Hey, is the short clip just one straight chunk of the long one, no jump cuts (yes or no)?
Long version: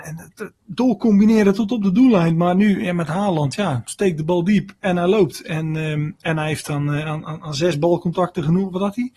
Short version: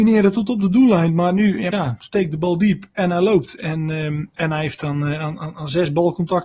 no